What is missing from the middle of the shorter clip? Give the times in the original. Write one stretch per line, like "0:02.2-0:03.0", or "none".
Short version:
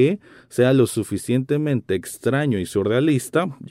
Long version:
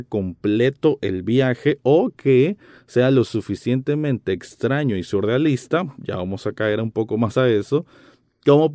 none